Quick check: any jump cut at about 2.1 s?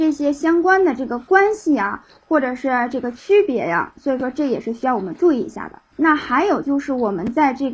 no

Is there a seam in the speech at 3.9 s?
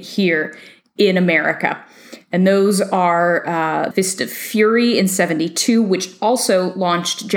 yes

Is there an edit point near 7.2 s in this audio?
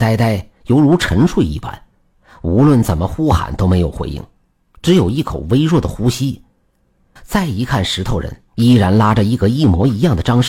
yes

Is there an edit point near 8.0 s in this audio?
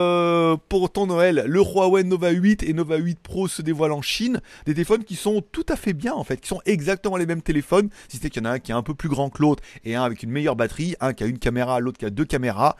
no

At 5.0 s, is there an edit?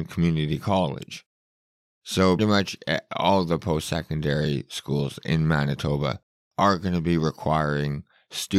no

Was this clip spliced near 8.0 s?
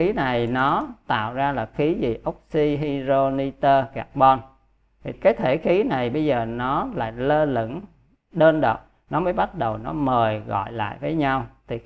no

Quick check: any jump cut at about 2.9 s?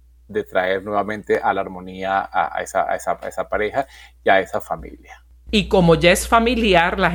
no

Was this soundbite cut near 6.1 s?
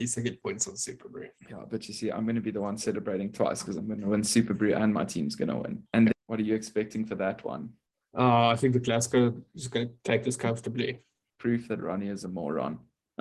yes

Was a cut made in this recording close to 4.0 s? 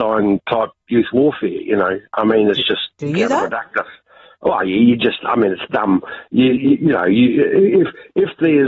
no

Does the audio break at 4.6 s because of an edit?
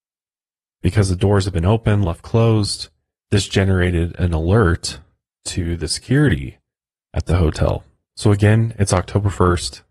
no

